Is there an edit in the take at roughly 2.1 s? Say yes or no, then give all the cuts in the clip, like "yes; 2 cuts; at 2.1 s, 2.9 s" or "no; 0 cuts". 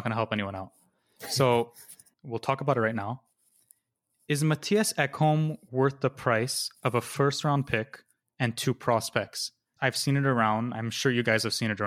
yes; 2 cuts; at 2.1 s, 9.8 s